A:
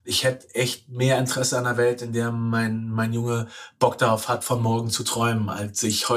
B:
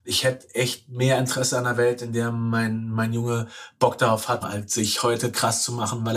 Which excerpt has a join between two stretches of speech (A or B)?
B